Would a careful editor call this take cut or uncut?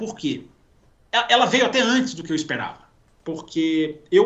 uncut